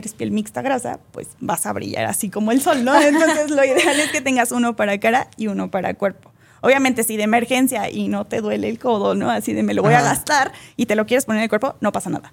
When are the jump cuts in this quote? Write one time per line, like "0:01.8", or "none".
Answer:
none